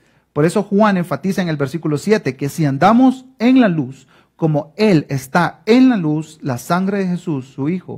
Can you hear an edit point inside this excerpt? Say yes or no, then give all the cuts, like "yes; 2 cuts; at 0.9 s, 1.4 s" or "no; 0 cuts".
no; 0 cuts